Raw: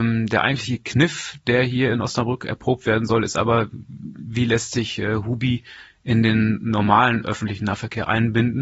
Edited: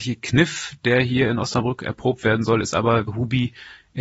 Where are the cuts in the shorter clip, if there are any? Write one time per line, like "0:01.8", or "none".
0:03.1